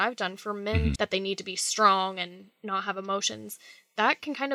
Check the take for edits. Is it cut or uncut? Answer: cut